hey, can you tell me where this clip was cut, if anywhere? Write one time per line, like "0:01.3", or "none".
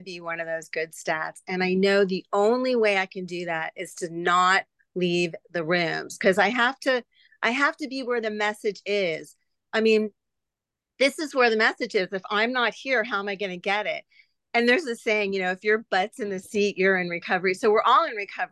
none